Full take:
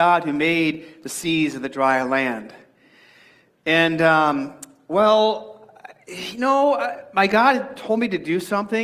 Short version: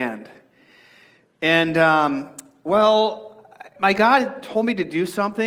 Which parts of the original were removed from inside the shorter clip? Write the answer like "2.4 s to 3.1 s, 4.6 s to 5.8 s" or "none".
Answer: 6.0 s to 7.1 s

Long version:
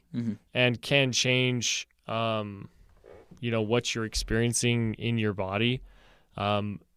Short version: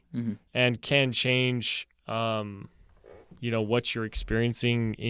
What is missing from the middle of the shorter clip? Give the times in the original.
none

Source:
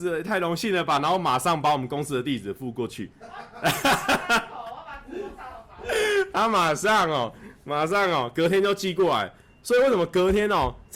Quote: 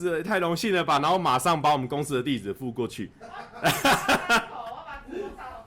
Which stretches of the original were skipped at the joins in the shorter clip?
none

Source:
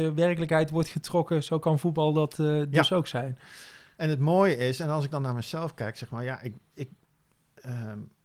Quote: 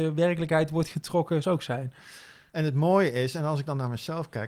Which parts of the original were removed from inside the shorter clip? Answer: 1.4 s to 2.9 s

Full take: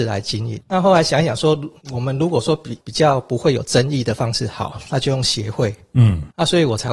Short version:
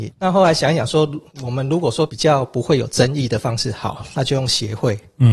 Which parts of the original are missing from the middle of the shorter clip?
2.6 s to 2.8 s

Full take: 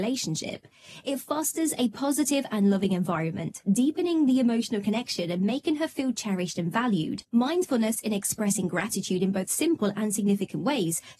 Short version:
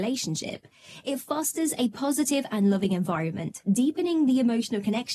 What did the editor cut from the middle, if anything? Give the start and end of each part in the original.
none

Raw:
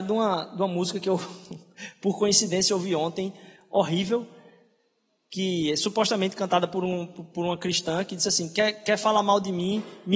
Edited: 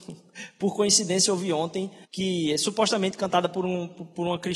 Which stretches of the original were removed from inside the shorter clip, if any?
3.5 s to 5.2 s

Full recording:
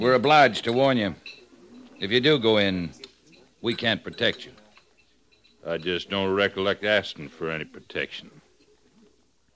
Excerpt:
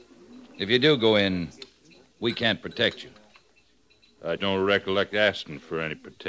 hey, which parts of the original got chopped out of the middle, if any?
5.8 s to 6.1 s

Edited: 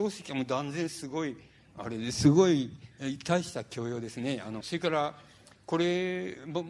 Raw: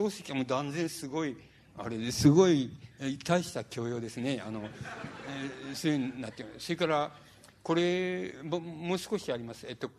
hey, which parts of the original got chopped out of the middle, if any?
4.6 s to 6.6 s

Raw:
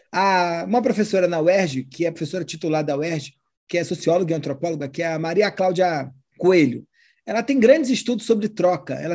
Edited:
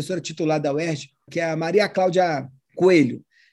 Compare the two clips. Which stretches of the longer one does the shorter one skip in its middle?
3.5 s to 4.9 s

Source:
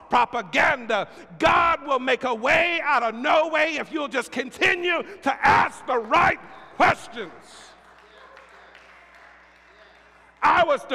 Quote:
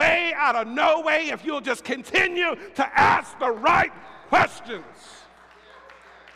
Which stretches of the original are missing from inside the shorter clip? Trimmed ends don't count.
none

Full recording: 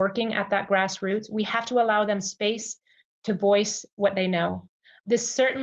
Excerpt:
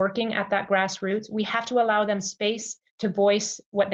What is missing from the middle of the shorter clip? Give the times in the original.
2.9 s to 3.1 s

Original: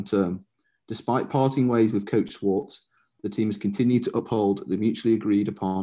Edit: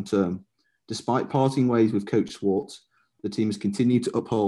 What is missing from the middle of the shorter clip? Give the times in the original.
none

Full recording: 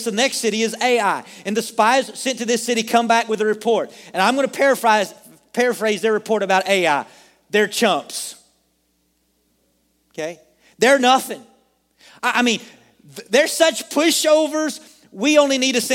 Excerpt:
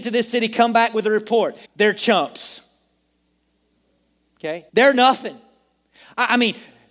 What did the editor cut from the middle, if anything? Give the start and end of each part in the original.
4.0 s to 7.4 s, 10.4 s to 10.7 s

